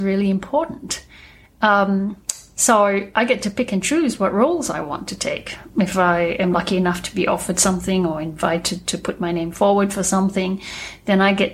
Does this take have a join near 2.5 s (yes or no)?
no